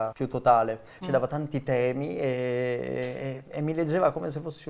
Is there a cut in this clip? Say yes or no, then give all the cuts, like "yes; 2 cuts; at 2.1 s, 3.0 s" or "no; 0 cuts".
yes; 1 cut; at 1.0 s